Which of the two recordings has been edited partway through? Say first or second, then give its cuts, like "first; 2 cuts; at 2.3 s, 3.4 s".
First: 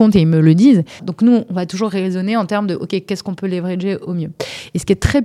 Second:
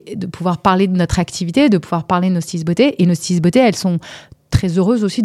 first; 1 cut; at 1.0 s